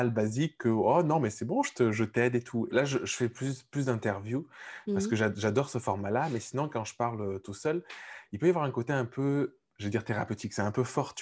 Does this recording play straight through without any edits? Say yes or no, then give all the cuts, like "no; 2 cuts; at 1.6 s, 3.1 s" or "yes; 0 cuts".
no; 1 cut; at 2.7 s